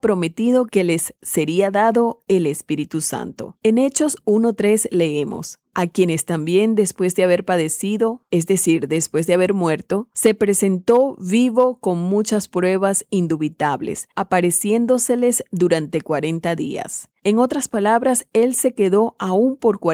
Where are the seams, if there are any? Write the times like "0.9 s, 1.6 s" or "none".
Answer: none